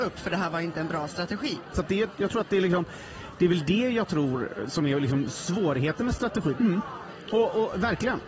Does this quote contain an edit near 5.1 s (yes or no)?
no